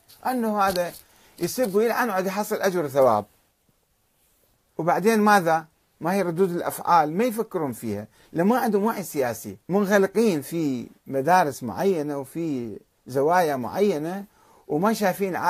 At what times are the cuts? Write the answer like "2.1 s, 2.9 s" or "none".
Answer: 9.6 s, 11.0 s

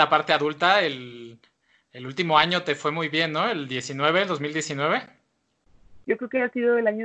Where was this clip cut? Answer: 6.0 s

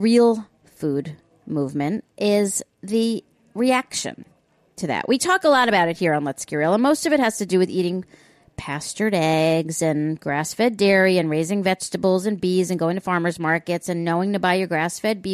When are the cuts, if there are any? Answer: 2.1 s

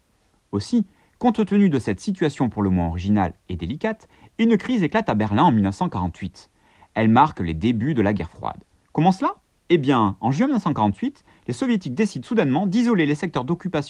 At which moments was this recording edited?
none

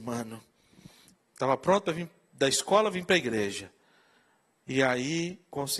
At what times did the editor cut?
1.1 s

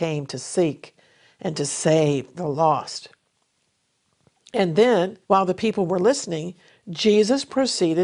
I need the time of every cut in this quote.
5.2 s

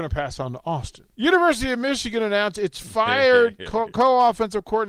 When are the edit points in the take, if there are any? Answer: 1.1 s

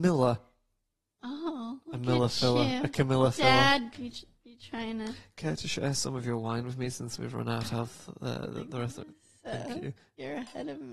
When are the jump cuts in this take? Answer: 3.9 s

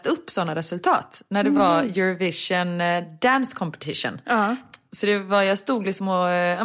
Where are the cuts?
none

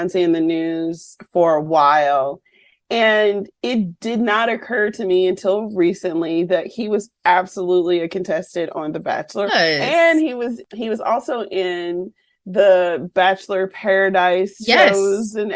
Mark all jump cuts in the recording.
9.5 s

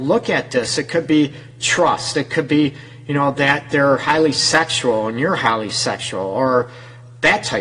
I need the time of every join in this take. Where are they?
2.1 s

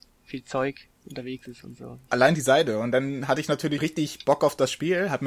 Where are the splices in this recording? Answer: 2.1 s, 3.8 s

